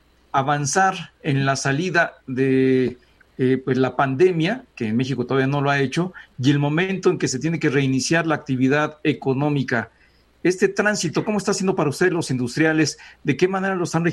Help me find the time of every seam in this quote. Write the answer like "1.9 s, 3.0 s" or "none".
none